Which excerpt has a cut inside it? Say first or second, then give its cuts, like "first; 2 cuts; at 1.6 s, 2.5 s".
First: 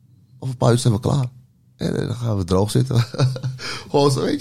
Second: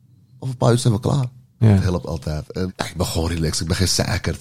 second; 2 cuts; at 1.6 s, 2.7 s